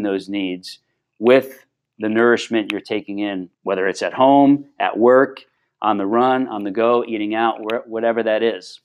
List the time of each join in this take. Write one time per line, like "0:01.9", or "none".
0:03.5